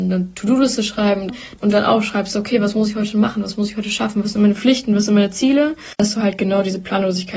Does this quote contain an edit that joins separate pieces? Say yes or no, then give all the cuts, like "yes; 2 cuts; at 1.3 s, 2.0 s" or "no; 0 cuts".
no; 0 cuts